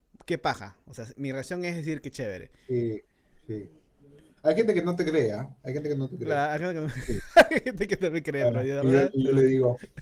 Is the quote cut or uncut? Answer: uncut